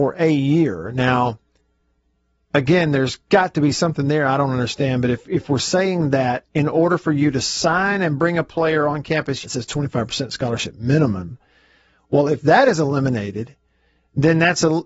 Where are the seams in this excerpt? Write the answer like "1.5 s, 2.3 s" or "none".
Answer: 9.4 s